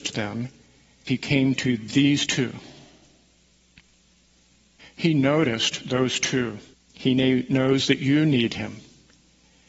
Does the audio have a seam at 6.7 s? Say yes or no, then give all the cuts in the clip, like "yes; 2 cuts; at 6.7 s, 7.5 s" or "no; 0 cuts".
yes; 3 cuts; at 1.1 s, 4.8 s, 6.7 s